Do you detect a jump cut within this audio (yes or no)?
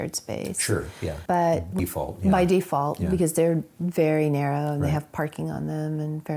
yes